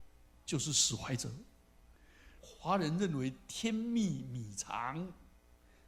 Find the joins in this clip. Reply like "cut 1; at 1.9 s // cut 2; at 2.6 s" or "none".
cut 1; at 2.4 s